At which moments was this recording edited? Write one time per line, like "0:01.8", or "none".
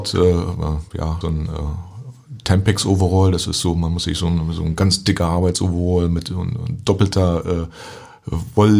0:01.2